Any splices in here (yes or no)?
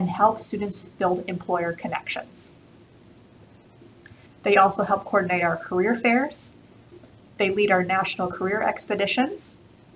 yes